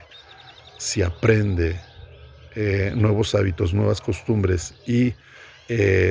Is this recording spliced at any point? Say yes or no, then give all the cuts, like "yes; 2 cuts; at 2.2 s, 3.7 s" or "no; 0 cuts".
no; 0 cuts